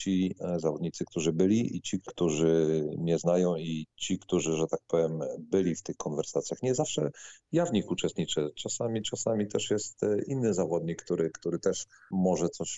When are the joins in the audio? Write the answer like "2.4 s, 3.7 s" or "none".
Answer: 2.0 s